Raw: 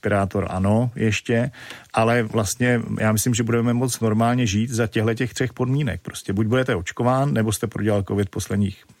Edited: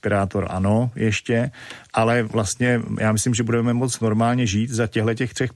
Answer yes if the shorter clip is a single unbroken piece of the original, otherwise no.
yes